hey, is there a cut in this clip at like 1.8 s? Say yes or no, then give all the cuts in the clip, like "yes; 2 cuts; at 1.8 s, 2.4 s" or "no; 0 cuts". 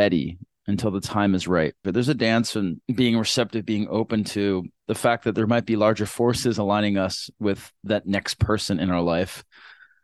yes; 1 cut; at 1.8 s